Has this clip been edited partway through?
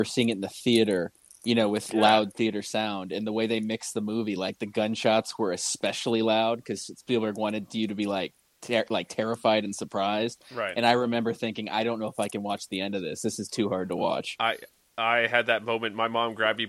no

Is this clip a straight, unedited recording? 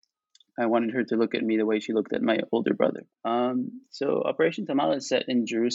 no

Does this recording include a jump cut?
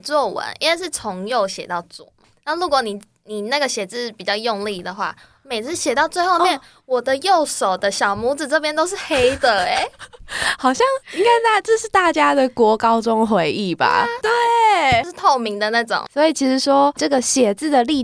yes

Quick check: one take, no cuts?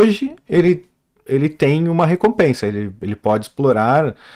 yes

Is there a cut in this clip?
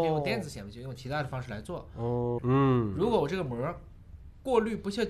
yes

